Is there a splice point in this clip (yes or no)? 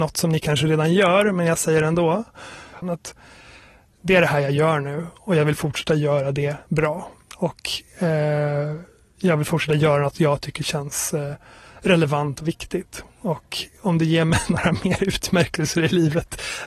yes